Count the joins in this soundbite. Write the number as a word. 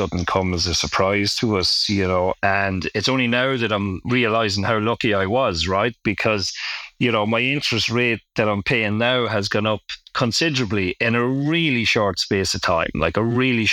one